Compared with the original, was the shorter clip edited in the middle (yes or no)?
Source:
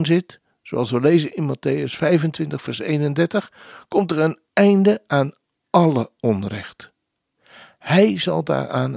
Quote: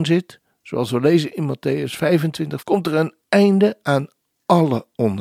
yes